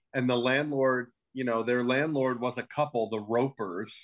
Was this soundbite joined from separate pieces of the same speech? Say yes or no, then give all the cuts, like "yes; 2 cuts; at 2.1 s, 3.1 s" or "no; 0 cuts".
no; 0 cuts